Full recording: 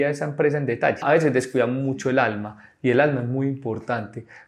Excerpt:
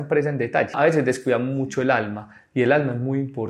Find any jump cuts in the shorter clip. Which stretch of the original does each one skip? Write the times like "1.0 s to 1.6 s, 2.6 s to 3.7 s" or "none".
none